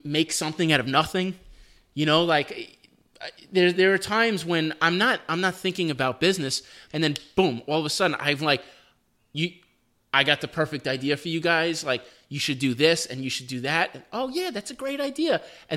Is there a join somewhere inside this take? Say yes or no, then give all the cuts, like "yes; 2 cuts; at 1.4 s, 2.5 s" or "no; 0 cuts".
yes; 1 cut; at 6.9 s